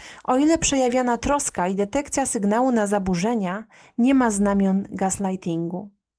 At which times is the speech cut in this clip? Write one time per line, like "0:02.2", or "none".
none